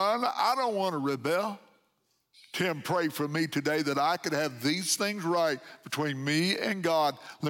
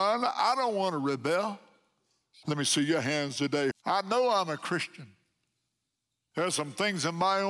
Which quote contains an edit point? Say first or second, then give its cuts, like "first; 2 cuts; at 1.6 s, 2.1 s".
second; 3 cuts; at 2.4 s, 3.7 s, 6.3 s